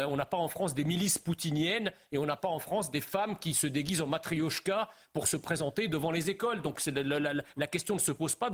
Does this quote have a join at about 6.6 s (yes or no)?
no